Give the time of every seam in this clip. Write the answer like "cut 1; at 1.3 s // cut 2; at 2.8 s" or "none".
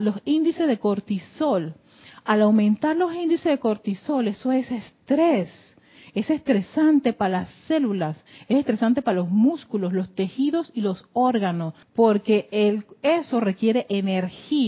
cut 1; at 11.8 s